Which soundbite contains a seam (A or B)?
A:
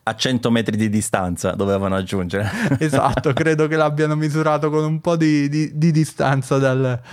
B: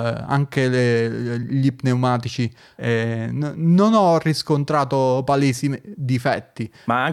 B